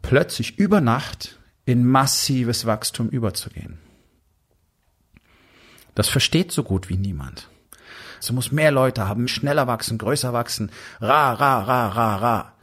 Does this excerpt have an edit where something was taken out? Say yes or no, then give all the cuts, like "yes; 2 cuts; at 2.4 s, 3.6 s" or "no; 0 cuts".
yes; 2 cuts; at 8.2 s, 9.3 s